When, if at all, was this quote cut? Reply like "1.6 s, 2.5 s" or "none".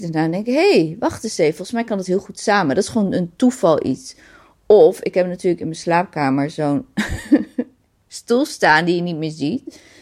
none